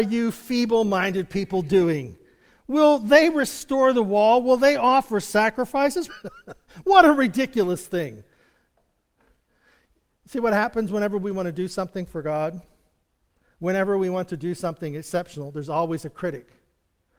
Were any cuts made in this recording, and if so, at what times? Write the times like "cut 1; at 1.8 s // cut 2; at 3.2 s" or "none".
cut 1; at 6.1 s

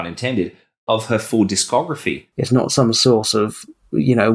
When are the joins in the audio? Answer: cut 1; at 2.3 s

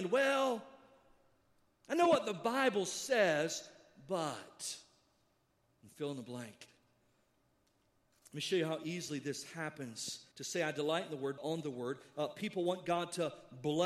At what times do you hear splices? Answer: cut 1; at 10.3 s // cut 2; at 11.4 s

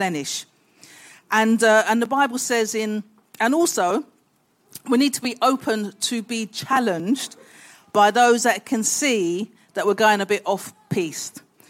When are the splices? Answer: none

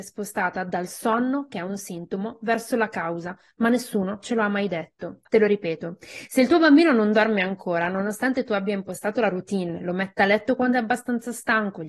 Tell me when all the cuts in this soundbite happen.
cut 1; at 5.3 s

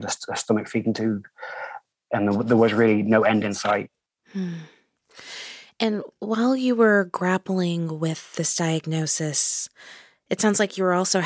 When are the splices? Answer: none

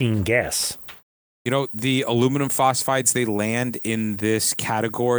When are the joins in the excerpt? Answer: none

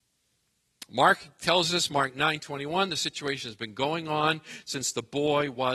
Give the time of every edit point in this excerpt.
none

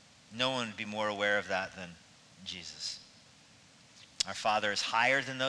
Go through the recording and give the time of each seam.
none

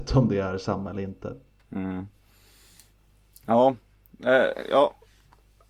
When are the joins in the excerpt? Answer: none

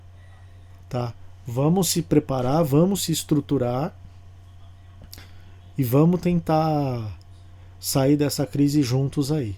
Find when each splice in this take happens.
none

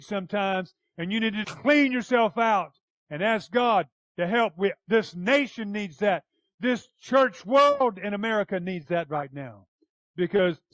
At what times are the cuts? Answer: cut 1; at 1.4 s

